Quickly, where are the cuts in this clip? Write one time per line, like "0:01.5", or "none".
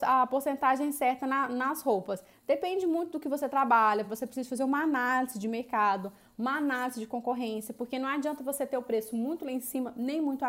none